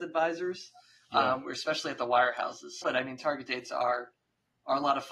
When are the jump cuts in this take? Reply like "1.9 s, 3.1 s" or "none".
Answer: 2.8 s